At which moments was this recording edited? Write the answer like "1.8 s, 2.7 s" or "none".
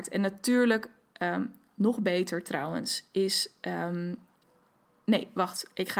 none